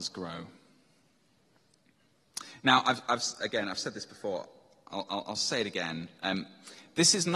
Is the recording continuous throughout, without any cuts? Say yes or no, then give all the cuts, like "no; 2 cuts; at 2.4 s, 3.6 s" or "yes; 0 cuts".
yes; 0 cuts